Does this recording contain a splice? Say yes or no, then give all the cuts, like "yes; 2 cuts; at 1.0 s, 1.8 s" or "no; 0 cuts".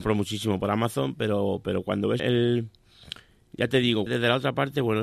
yes; 2 cuts; at 2.2 s, 4.1 s